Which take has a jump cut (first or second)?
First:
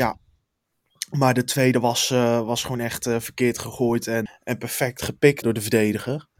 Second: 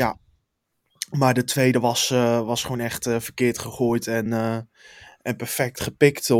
first